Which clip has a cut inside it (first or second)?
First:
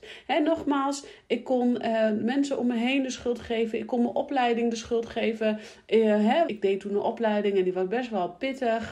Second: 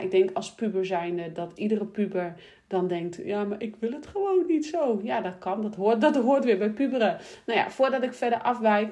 first